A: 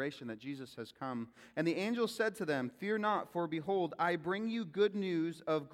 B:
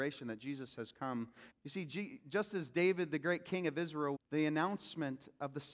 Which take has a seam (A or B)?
B